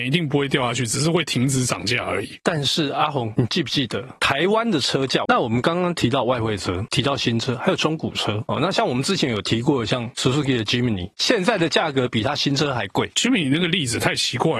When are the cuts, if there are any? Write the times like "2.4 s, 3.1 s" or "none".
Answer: 5.2 s, 8.5 s